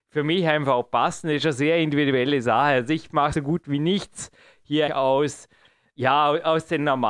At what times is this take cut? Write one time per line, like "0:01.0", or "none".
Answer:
0:03.3
0:04.9